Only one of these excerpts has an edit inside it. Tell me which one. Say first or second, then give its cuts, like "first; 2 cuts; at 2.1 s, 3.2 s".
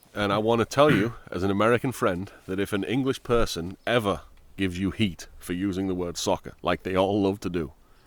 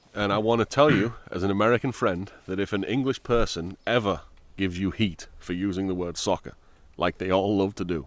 first; 1 cut; at 6.6 s